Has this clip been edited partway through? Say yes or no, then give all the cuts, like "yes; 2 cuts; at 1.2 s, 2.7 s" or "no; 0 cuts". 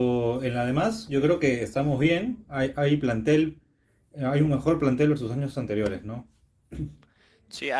no; 0 cuts